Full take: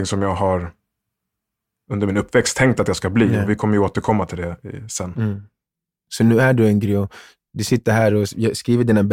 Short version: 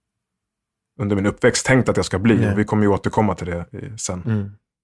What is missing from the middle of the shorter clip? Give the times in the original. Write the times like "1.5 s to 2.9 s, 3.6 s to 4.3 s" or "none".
none

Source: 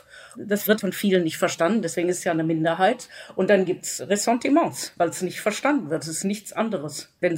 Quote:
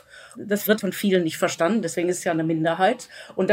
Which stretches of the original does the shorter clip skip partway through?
none

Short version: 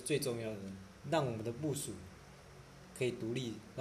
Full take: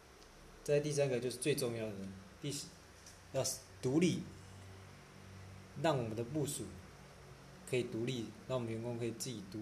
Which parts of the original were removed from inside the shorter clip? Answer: 2.4 s to 5.7 s

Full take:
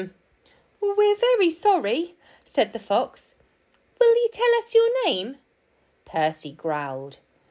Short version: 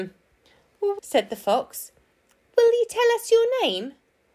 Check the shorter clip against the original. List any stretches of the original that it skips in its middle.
1.0 s to 2.4 s

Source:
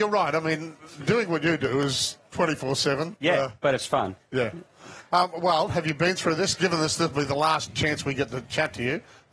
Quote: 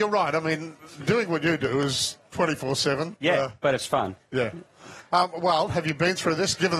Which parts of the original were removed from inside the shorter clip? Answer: none

